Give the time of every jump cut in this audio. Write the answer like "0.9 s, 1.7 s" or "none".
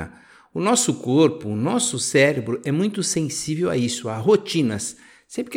none